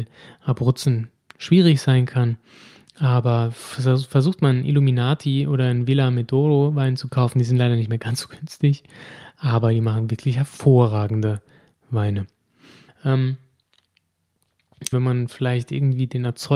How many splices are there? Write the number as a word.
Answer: two